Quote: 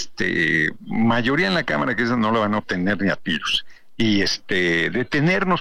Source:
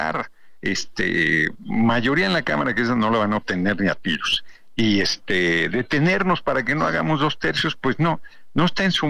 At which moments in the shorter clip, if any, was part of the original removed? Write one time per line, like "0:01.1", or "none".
none